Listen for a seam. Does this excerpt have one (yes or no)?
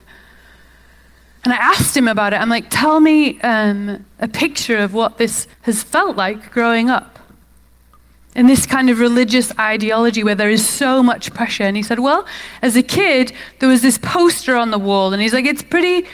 yes